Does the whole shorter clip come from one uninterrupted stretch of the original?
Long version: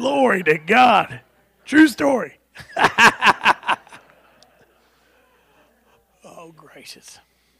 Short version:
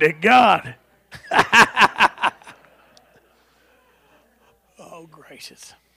no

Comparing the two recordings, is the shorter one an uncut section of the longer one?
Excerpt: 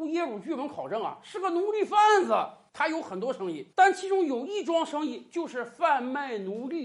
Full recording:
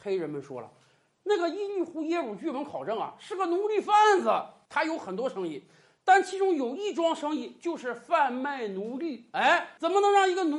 no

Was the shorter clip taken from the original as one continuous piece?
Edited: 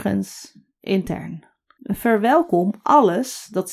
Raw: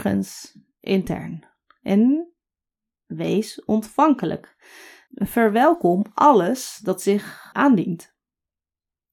no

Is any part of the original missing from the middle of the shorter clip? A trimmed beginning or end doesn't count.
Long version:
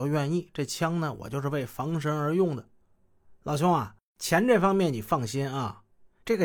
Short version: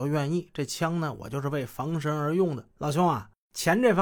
yes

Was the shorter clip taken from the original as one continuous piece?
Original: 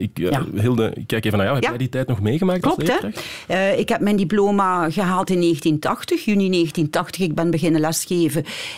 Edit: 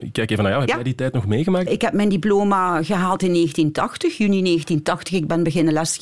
no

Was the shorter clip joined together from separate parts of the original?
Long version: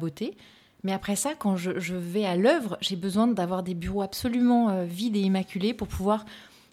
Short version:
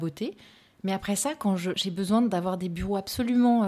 yes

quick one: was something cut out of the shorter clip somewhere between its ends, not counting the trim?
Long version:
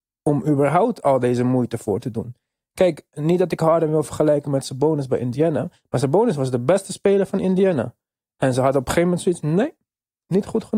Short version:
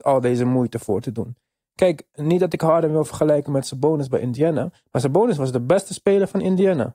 no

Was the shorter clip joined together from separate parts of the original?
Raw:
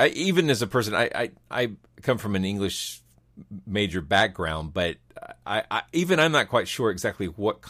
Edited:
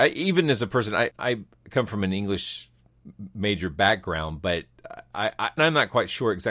yes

